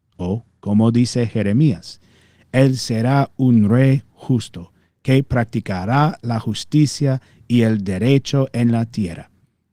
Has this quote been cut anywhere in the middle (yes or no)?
no